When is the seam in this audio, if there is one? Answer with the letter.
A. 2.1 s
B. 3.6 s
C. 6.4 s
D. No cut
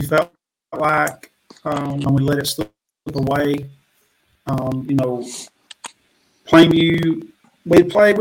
A